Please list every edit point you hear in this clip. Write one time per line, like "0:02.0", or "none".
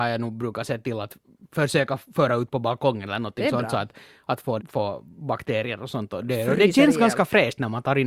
0:04.6